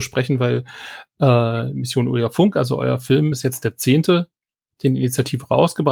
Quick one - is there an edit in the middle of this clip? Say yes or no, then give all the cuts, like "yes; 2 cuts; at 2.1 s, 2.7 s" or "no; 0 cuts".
no; 0 cuts